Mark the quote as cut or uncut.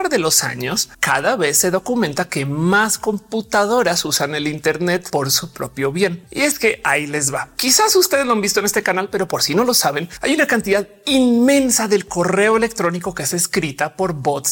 uncut